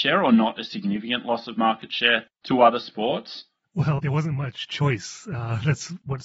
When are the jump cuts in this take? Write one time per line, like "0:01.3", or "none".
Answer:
0:04.0

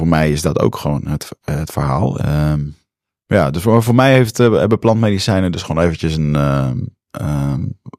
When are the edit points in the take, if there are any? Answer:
0:02.2

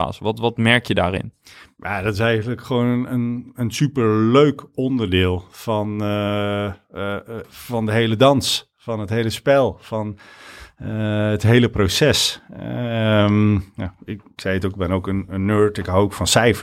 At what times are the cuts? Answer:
0:07.4

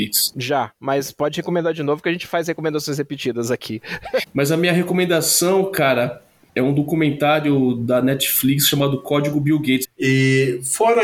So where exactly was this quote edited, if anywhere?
0:04.2
0:09.8

